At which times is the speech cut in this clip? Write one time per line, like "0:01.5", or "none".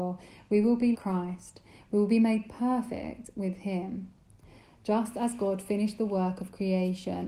0:00.9